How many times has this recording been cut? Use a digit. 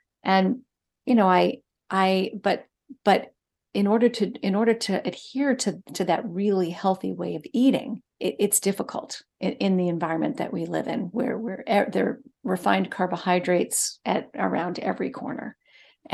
1